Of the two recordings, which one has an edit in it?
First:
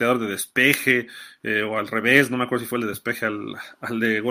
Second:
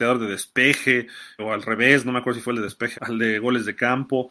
second; 2 cuts; at 1.4 s, 2.9 s

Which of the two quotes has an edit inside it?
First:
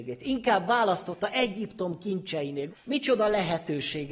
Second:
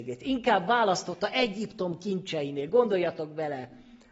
first; 1 cut; at 2.7 s

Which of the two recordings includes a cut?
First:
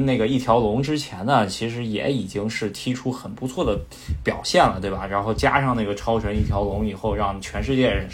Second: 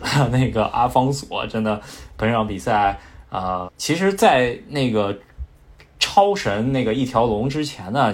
second; 1 cut; at 3.6 s

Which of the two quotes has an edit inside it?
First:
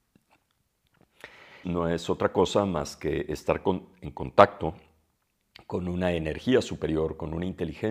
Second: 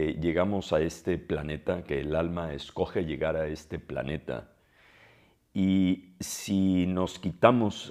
first; 1 cut; at 1.6 s

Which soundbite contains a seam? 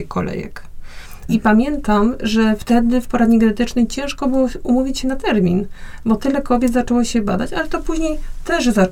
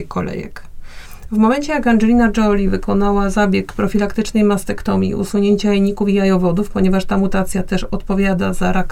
first; 1 cut; at 1.3 s

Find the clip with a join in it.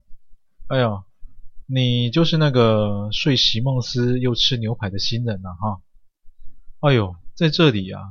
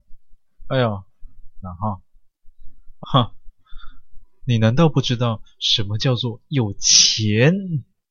second; 2 cuts; at 1.6 s, 3.0 s

